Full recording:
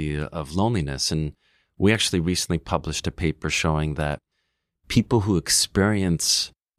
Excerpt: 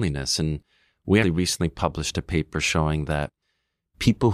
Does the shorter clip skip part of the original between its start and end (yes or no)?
yes